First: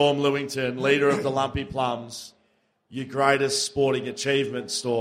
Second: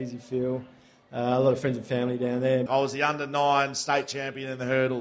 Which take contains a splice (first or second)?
second